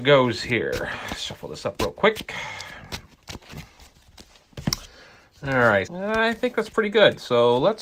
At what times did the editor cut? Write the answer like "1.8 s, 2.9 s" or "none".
5.9 s